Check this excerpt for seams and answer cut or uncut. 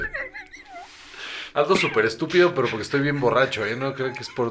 uncut